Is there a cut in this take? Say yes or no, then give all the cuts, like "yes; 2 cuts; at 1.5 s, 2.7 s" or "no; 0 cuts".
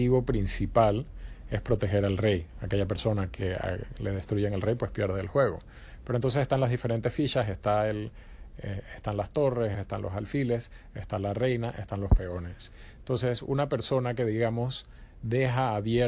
yes; 1 cut; at 9.7 s